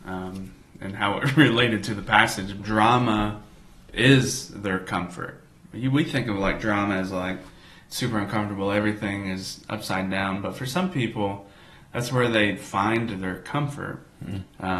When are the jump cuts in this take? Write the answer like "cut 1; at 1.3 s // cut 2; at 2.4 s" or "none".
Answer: cut 1; at 2.6 s